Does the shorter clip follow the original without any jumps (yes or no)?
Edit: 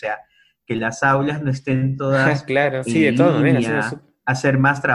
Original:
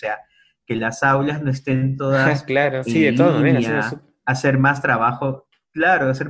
yes